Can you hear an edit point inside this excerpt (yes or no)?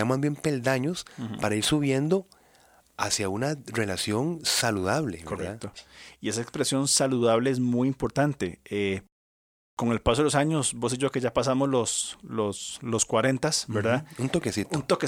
no